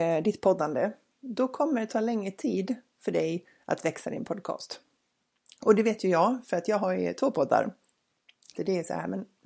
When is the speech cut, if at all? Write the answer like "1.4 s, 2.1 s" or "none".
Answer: 8.6 s